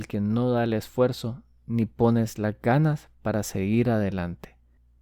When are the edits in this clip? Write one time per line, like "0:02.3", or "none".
none